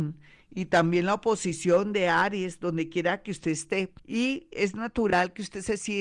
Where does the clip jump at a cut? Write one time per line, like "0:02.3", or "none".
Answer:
0:04.0